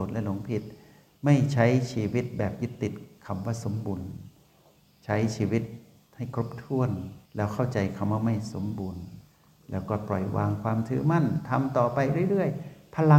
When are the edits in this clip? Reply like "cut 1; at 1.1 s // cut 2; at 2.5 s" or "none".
cut 1; at 7.2 s

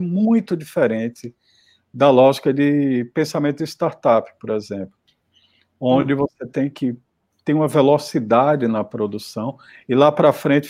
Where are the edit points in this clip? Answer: none

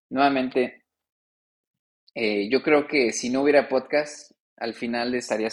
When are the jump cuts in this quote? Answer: none

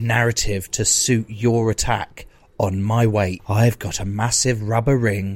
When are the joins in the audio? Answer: cut 1; at 3.4 s

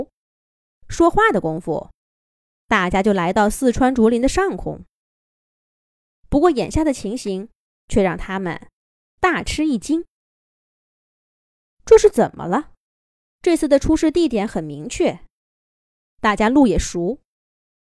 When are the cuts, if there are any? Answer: cut 1; at 13.3 s

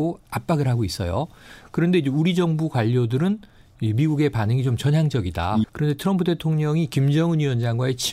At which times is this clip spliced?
cut 1; at 5.6 s

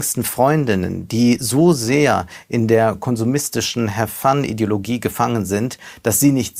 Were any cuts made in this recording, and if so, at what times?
none

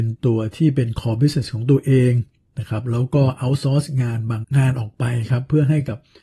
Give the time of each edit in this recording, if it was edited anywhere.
cut 1; at 4.4 s

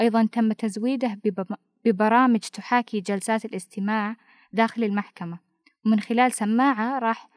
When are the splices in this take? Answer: none

